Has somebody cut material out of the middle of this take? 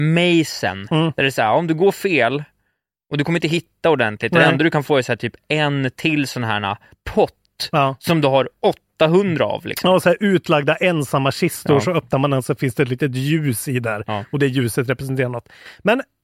no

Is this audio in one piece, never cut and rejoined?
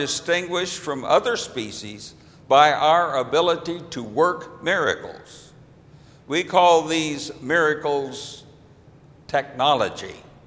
yes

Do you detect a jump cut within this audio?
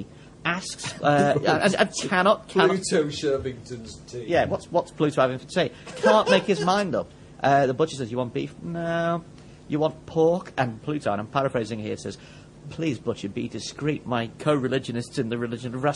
no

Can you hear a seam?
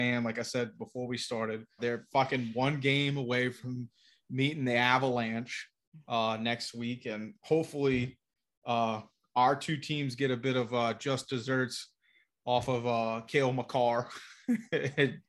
yes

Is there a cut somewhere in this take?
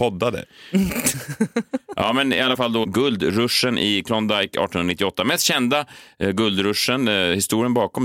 no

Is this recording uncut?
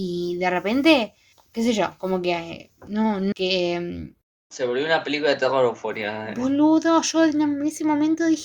no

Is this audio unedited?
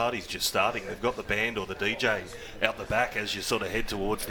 yes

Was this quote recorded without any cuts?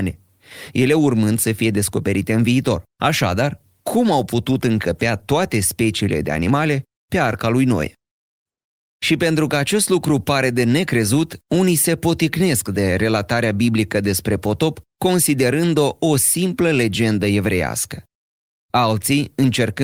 no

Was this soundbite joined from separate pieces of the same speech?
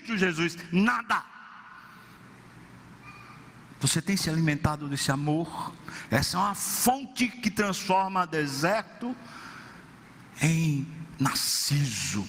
no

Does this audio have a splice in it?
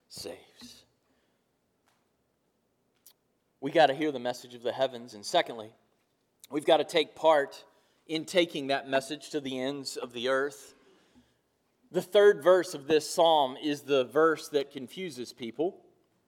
no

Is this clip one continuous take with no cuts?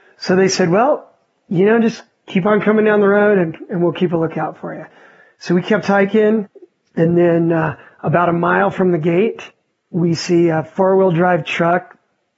yes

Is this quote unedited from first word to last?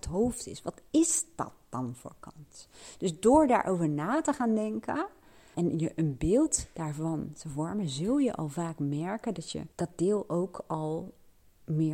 no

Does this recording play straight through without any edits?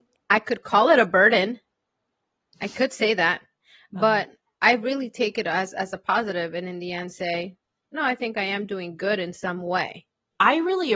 yes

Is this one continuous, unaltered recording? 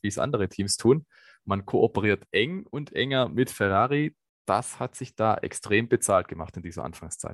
yes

